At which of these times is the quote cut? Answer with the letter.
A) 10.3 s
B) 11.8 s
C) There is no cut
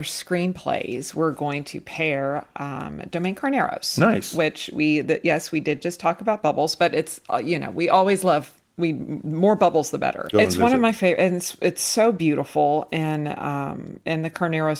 A